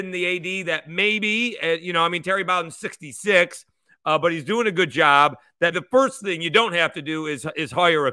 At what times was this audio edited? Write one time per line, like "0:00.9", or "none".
0:05.7